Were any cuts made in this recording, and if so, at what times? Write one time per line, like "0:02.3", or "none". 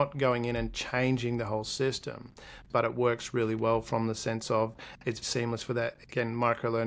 0:02.6
0:05.2